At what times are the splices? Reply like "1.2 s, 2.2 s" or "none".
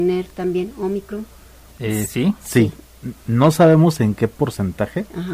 none